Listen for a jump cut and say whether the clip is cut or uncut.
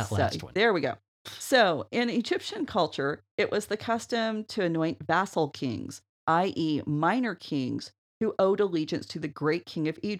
uncut